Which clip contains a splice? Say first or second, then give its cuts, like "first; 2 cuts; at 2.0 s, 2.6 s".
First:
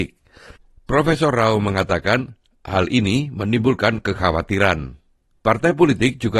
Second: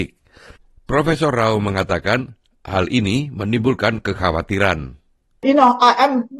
first; 1 cut; at 5.4 s